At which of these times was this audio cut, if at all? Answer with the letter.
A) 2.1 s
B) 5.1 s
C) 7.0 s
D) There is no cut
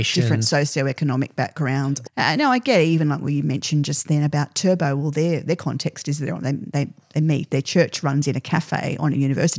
A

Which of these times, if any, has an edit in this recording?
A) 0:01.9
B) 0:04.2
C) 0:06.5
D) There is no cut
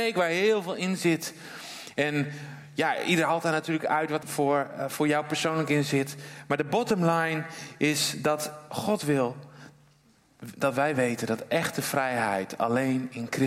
B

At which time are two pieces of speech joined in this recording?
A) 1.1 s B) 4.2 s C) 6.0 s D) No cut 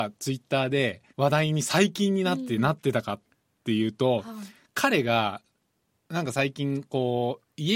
A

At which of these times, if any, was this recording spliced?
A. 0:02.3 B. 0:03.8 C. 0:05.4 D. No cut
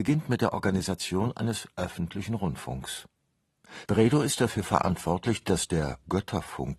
D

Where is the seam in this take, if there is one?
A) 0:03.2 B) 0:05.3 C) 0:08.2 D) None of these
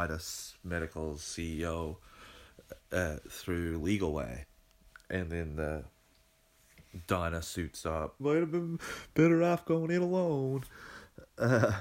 C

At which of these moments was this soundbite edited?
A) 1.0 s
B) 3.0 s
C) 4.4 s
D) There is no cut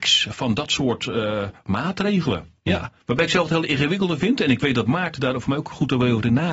B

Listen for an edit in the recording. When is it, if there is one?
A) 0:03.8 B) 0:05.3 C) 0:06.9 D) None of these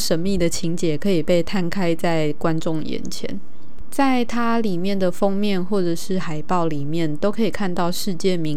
A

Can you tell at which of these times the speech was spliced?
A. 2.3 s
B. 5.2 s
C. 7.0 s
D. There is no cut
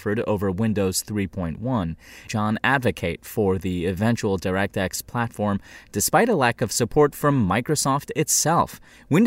A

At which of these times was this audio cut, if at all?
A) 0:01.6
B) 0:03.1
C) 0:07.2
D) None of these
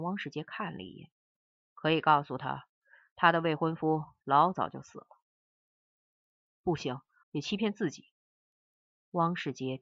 C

